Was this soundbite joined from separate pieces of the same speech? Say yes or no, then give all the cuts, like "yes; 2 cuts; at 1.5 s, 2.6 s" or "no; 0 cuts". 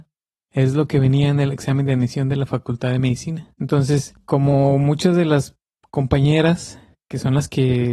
no; 0 cuts